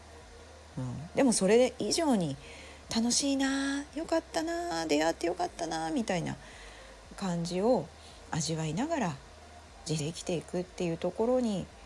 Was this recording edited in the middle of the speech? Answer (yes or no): yes